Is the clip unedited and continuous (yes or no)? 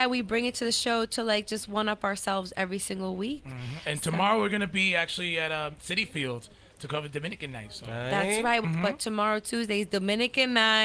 no